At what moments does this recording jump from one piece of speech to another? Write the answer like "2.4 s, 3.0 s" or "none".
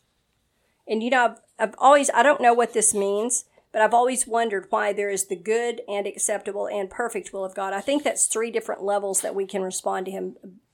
none

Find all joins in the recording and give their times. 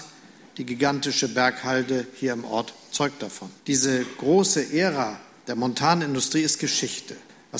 3.6 s

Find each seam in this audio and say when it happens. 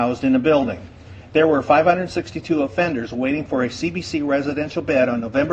none

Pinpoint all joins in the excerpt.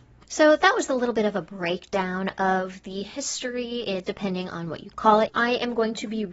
4.0 s, 5.3 s

